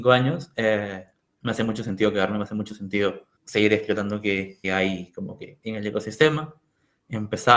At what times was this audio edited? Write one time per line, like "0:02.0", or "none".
0:03.4
0:04.6